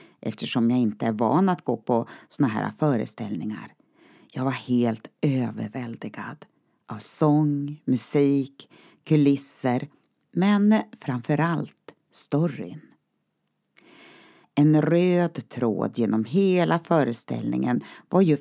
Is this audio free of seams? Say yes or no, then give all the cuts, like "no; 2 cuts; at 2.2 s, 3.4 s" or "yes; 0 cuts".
no; 1 cut; at 14.4 s